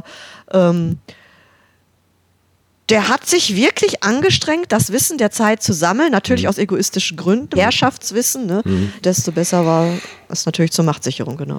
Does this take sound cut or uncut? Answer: cut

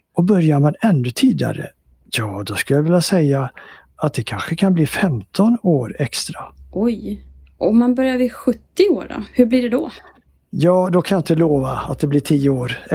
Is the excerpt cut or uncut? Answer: uncut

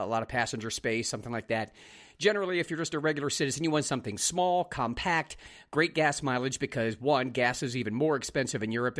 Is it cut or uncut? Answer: uncut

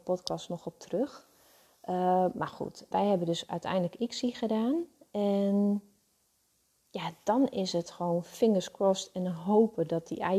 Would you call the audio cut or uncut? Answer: cut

